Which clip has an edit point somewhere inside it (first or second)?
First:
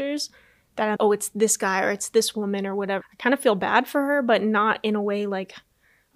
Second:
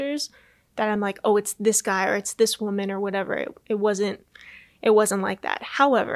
first